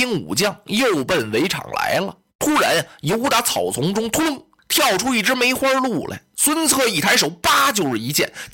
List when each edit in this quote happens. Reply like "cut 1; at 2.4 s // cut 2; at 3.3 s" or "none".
none